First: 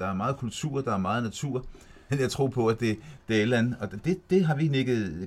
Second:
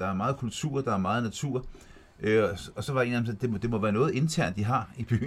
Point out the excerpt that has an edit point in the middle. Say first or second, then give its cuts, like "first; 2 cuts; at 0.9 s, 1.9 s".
first; 1 cut; at 2.1 s